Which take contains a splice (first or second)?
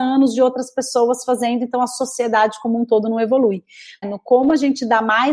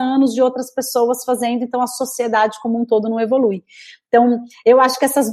first